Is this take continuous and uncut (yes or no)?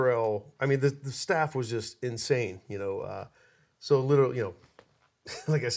yes